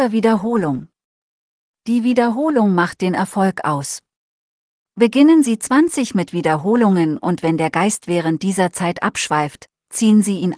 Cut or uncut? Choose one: cut